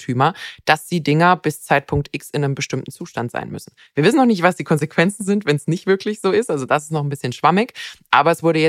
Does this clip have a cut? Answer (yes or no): no